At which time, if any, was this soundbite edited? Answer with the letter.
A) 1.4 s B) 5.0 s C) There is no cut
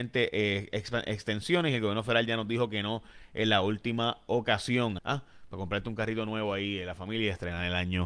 B